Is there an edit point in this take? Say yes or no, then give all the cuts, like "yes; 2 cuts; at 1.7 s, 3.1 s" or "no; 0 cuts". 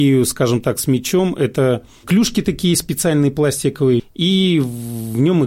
yes; 1 cut; at 4.0 s